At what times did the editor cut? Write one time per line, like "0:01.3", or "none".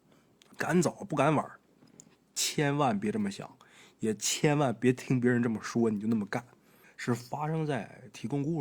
0:06.8